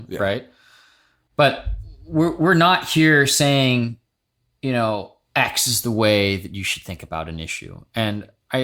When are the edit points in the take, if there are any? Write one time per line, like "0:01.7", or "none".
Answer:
none